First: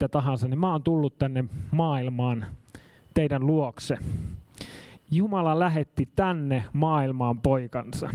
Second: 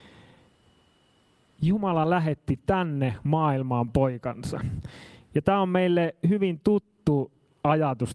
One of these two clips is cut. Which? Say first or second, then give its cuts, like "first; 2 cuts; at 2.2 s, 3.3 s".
first; 1 cut; at 5.0 s